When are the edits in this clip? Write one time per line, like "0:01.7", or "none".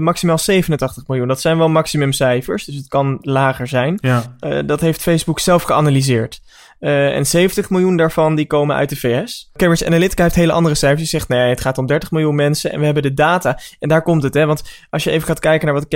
none